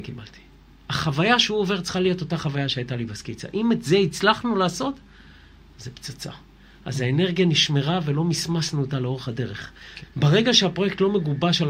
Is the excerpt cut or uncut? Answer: cut